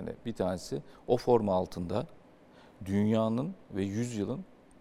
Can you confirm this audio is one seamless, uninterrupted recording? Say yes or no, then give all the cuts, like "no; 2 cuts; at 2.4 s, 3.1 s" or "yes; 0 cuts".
yes; 0 cuts